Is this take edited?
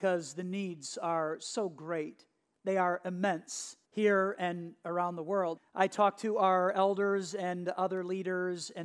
yes; 2 cuts; at 3.8 s, 5.6 s

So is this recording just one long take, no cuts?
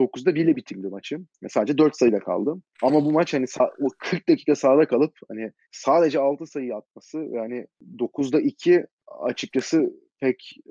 no; 1 cut; at 2.7 s

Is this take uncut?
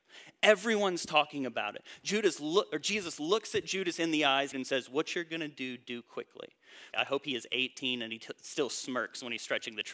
no; 2 cuts; at 4.5 s, 6.9 s

